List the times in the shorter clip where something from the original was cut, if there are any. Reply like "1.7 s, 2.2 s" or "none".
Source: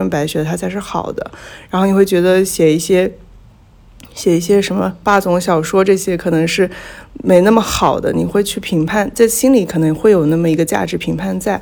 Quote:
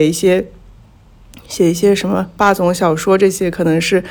none